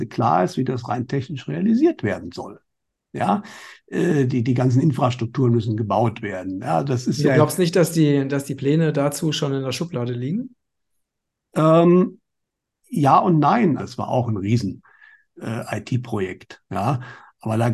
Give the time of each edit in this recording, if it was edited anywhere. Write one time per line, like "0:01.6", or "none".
0:13.8